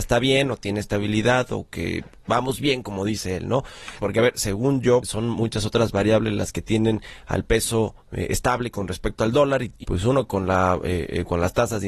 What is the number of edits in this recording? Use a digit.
3